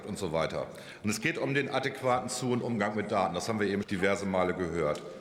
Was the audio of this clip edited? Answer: yes; 1 cut; at 3.8 s

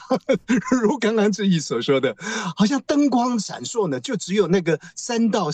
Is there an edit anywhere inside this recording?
no; 0 cuts

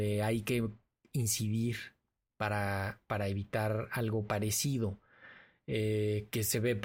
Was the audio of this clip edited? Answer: no; 0 cuts

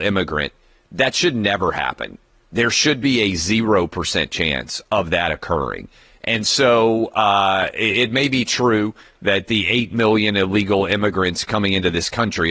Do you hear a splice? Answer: no; 0 cuts

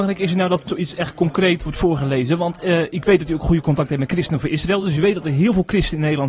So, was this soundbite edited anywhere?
no; 0 cuts

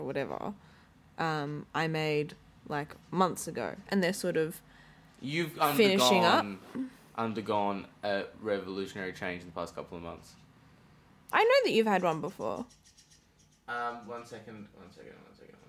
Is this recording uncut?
no; 2 cuts; at 3.9 s, 11.3 s

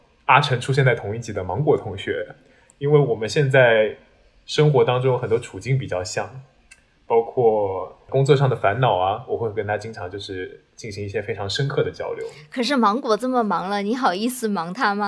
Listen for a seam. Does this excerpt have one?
no; 0 cuts

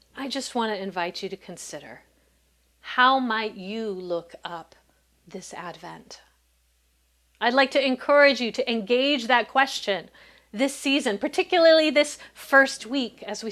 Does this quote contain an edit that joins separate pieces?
no; 0 cuts

